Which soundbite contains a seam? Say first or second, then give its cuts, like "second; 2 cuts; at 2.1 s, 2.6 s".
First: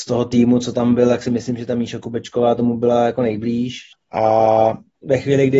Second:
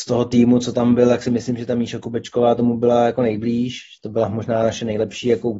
first; 1 cut; at 3.9 s